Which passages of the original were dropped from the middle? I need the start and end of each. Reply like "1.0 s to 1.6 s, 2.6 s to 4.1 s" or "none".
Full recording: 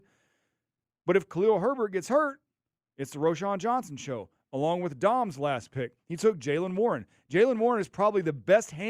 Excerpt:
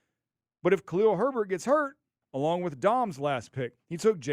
2.7 s to 4.4 s